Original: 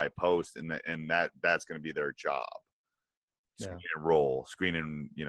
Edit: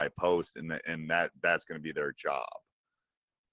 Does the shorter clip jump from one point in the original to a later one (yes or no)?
no